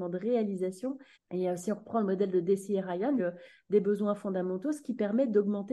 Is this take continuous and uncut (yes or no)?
no